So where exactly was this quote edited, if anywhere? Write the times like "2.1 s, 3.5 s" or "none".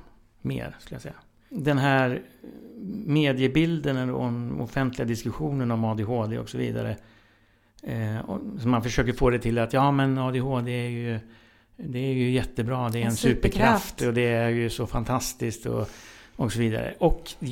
none

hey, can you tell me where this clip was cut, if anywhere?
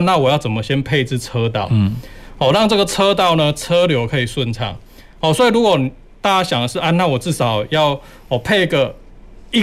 none

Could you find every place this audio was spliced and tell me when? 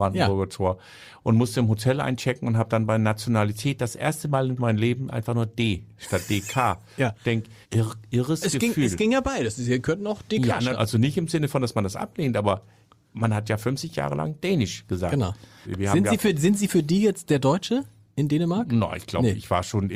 7.6 s, 10.7 s, 15.6 s

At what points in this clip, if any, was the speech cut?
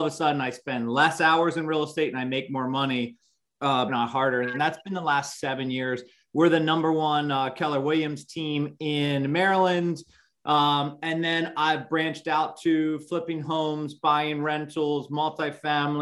3.9 s

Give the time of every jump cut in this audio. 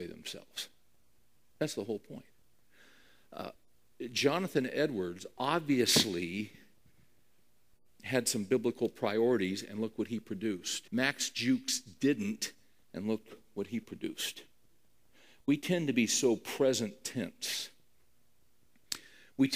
10.9 s

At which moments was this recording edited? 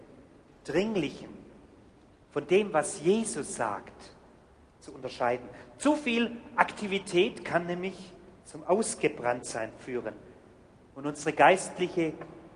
8.4 s

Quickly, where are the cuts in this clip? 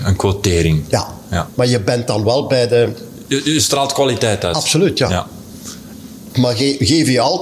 1.5 s, 6.3 s

